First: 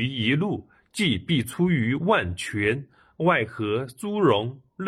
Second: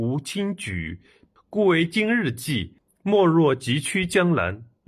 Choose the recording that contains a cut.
second; 1 cut; at 1.4 s

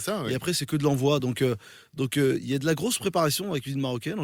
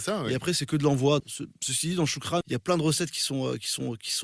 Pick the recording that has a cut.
second; 2 cuts; at 1.2 s, 2.4 s

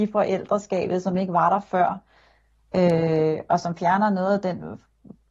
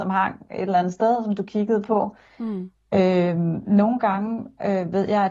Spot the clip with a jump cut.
second; 1 cut; at 2.7 s

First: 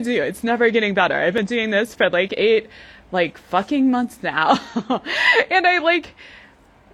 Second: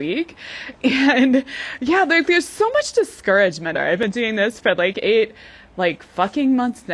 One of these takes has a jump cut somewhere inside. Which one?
second; 1 cut; at 3.7 s

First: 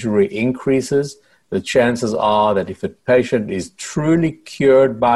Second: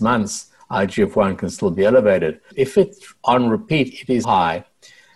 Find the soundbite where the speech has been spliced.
second; 2 cuts; at 2.5 s, 4.2 s

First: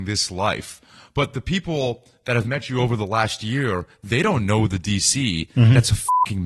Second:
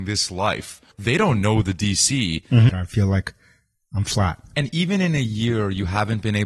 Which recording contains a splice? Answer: second; 2 cuts; at 0.9 s, 2.7 s

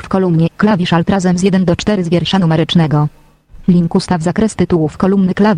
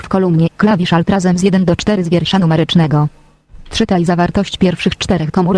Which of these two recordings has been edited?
first; 1 cut; at 3.6 s

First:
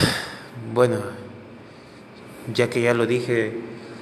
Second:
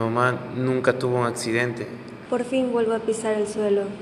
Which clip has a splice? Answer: second; 1 cut; at 2.3 s

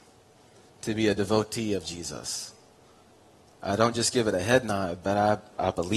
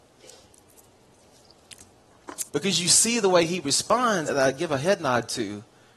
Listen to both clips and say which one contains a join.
second; 2 cuts; at 2.5 s, 4.3 s

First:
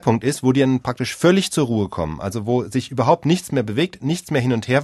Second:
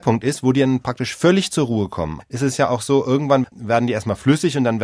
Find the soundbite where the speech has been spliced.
second; 2 cuts; at 2.2 s, 3.4 s

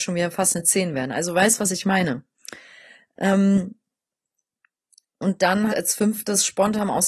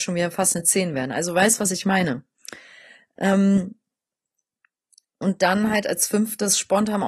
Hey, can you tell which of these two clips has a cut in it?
first; 1 cut; at 5.7 s

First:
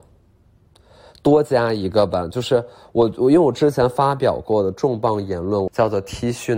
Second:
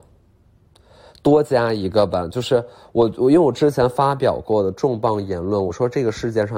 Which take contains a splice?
first; 1 cut; at 5.7 s

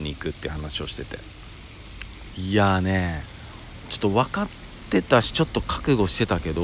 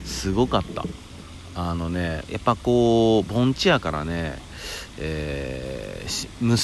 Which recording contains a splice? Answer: first; 1 cut; at 2.3 s

